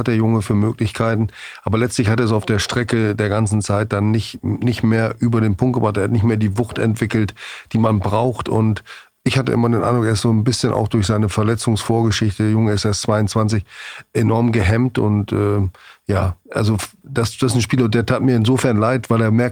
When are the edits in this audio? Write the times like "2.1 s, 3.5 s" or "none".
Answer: none